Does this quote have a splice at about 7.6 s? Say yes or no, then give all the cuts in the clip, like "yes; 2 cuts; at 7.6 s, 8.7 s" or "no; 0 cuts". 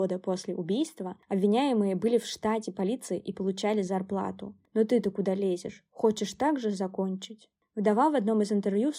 no; 1 cut; at 4.6 s